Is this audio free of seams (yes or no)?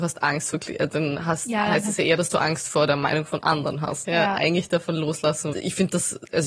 no